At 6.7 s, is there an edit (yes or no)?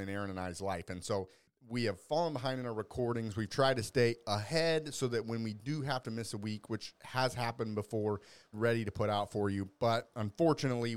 no